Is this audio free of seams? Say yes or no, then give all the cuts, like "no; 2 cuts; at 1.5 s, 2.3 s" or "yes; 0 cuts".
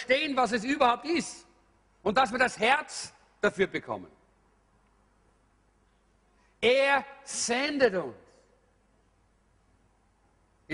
yes; 0 cuts